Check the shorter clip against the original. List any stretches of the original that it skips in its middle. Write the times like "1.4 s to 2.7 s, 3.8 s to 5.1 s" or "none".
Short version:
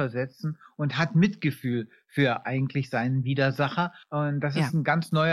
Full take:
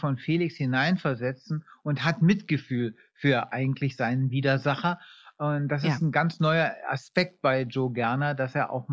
5.1 s to 5.3 s